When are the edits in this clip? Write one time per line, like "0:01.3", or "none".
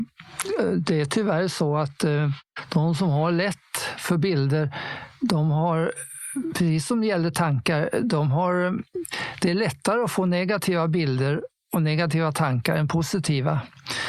none